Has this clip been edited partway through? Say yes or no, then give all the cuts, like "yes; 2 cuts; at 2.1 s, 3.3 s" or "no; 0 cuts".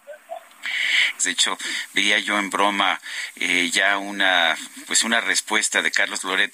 yes; 1 cut; at 1.2 s